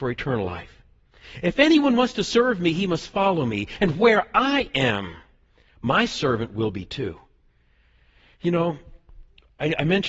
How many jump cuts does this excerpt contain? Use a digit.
0